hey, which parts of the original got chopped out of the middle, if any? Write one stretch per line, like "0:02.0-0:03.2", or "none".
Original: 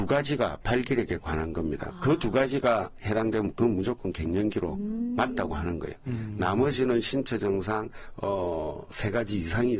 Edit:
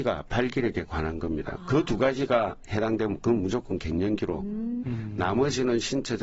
0:05.2-0:06.0